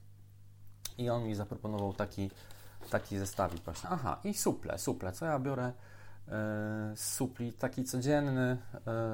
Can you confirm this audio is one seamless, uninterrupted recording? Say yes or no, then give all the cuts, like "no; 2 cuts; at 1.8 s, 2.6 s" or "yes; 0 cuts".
no; 2 cuts; at 0.9 s, 3.8 s